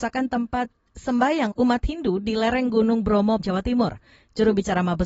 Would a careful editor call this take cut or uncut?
cut